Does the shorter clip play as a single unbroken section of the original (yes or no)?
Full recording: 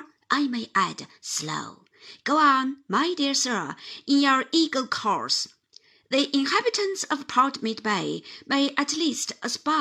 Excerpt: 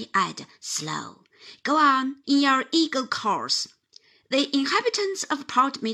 no